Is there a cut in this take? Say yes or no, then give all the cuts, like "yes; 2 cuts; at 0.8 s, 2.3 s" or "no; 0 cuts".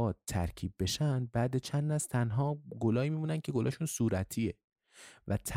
no; 0 cuts